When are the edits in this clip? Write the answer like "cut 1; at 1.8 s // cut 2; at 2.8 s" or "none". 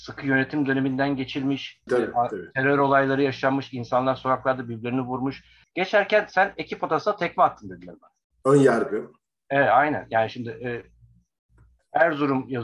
cut 1; at 1.9 s // cut 2; at 5.6 s // cut 3; at 8.4 s